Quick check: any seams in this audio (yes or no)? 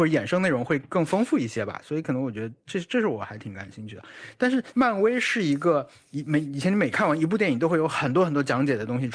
yes